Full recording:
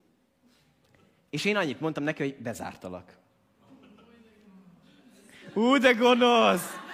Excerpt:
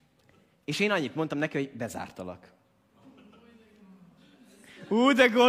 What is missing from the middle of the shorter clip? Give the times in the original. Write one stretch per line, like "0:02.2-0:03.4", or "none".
none